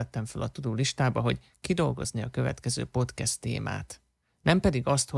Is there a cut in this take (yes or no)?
no